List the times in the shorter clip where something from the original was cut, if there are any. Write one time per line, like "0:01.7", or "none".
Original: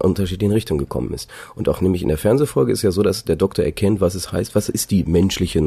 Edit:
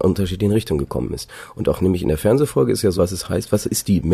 0:03.0